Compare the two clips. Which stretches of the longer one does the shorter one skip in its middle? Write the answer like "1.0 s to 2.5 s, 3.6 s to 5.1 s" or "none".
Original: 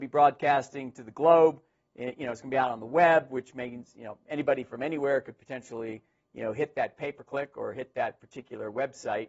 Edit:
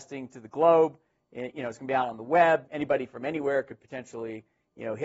3.3 s to 4.2 s